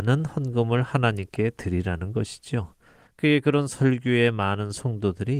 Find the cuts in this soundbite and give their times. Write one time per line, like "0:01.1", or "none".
0:03.1